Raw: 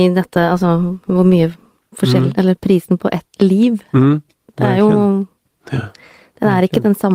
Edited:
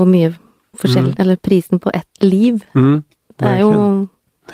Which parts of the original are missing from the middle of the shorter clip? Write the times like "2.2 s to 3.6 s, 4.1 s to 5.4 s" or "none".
none